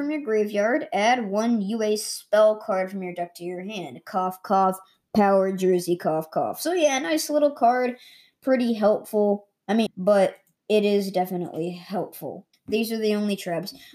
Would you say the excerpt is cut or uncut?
cut